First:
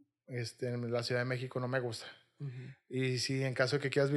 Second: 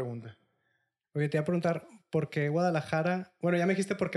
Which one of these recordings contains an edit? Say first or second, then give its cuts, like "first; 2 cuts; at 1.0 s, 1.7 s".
second; 1 cut; at 1.0 s